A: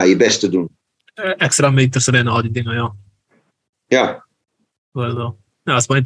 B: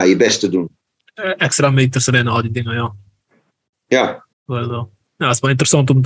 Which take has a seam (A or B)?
B